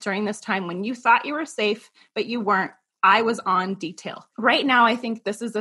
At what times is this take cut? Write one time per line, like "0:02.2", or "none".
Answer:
none